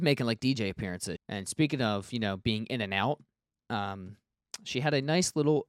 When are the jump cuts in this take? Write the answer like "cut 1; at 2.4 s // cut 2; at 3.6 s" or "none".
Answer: cut 1; at 1.2 s